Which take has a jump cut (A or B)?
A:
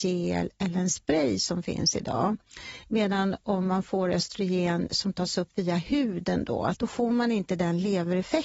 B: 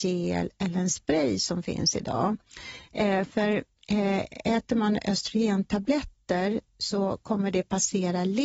A